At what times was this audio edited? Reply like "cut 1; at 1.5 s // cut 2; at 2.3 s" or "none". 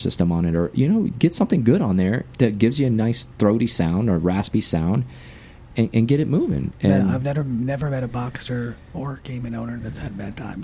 none